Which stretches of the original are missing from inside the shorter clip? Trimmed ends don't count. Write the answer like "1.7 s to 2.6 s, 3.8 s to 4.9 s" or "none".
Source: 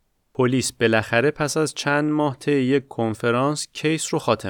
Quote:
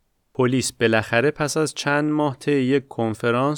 none